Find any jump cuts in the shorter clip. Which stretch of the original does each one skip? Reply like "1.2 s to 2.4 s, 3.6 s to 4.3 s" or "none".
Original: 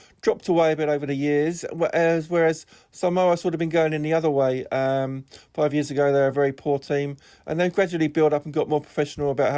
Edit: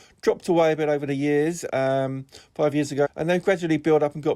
1.7 s to 4.7 s, 6.0 s to 7.4 s